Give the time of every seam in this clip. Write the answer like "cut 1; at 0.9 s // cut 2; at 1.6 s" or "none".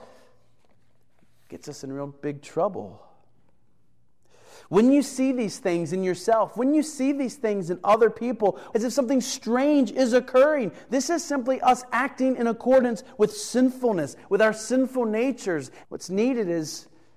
cut 1; at 8.7 s // cut 2; at 15.8 s